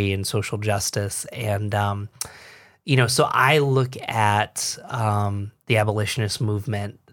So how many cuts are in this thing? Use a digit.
0